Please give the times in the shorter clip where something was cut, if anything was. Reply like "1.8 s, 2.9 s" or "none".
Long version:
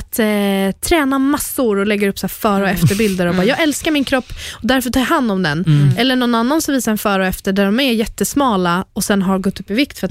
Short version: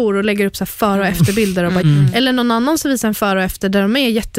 1.8 s